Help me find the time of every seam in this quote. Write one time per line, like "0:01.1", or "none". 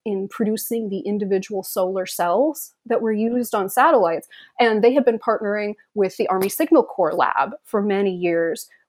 none